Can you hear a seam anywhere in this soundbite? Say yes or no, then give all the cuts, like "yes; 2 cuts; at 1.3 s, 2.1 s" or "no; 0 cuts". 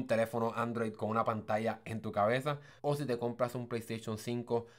yes; 1 cut; at 2.8 s